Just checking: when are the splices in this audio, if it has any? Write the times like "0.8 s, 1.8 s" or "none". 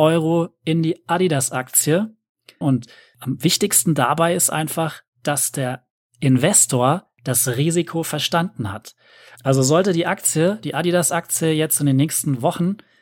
2.6 s, 9.4 s